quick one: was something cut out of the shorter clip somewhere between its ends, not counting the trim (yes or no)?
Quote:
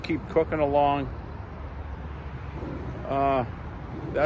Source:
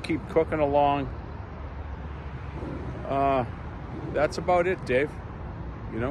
no